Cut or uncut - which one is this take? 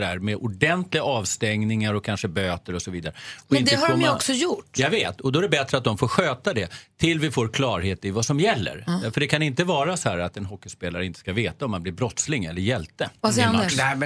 uncut